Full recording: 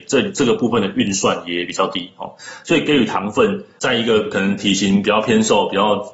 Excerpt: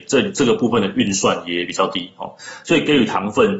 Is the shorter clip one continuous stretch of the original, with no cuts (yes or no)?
yes